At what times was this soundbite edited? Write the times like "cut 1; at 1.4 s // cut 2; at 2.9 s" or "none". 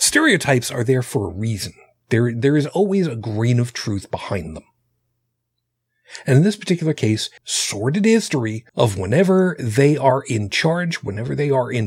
cut 1; at 7.4 s // cut 2; at 8.7 s